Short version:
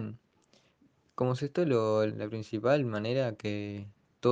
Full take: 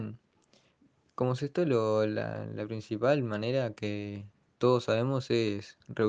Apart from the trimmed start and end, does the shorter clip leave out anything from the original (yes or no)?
yes